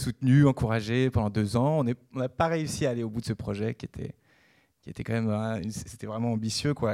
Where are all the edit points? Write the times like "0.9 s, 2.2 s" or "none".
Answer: none